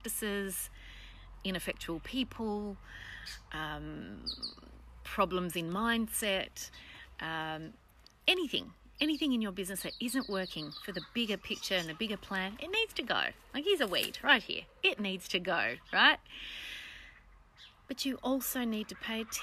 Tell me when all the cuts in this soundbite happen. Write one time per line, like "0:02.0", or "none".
none